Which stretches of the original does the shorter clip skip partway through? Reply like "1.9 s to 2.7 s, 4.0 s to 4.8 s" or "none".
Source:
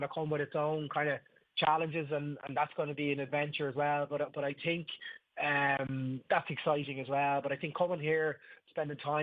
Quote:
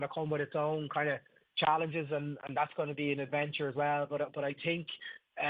none